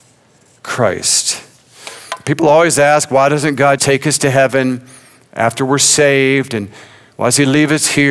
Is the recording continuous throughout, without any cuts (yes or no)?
no